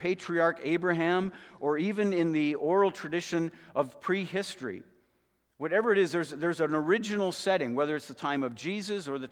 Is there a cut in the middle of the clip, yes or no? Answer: no